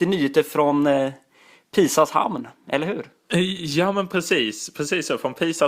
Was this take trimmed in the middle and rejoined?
no; 0 cuts

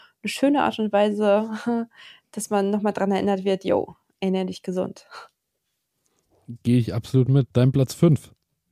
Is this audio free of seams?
yes; 0 cuts

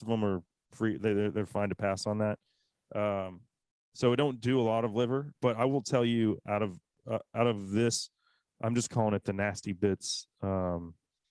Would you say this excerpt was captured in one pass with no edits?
yes; 0 cuts

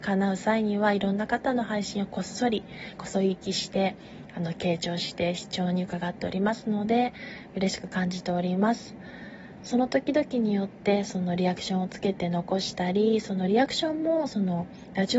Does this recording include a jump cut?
no; 0 cuts

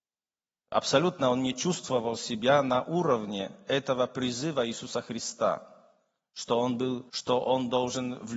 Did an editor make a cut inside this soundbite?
yes; 1 cut; at 7.1 s

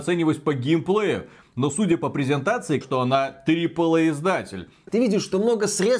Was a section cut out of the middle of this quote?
yes; 2 cuts; at 2.8 s, 4.9 s

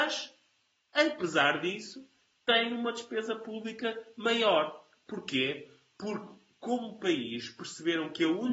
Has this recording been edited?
no; 0 cuts

